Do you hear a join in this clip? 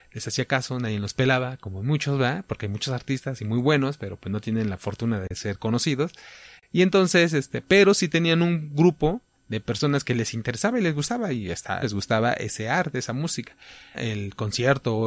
yes; 2 cuts; at 11.8 s, 13.9 s

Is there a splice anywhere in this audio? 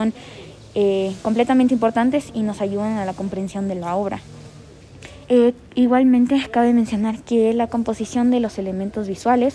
yes; 1 cut; at 5.2 s

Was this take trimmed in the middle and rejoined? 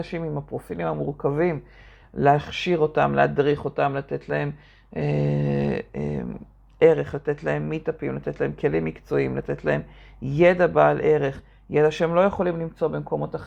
no; 0 cuts

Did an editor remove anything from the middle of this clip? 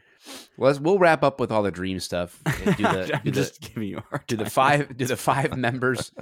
no; 0 cuts

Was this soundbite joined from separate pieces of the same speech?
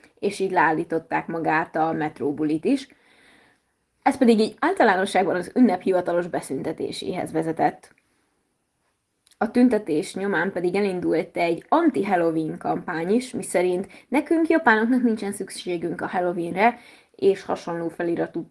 no; 0 cuts

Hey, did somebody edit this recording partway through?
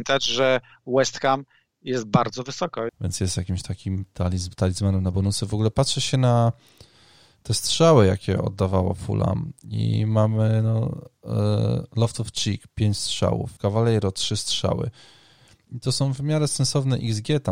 yes; 2 cuts; at 2.9 s, 13.6 s

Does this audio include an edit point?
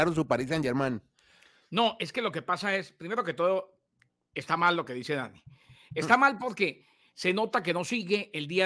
no; 0 cuts

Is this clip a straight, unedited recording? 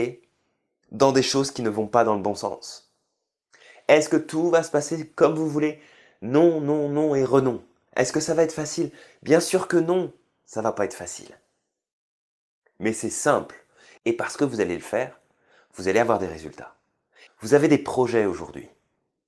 no; 2 cuts; at 14.0 s, 17.3 s

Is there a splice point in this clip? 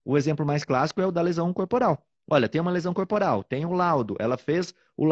no; 0 cuts

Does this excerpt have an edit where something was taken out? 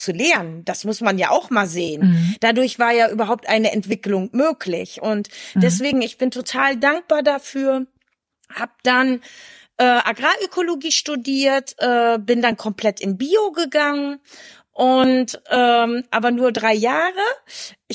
no; 0 cuts

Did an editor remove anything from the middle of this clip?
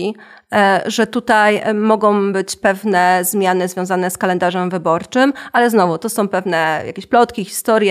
no; 0 cuts

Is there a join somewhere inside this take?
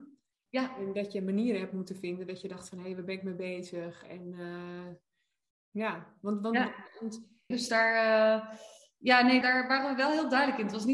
yes; 2 cuts; at 7.5 s, 9.4 s

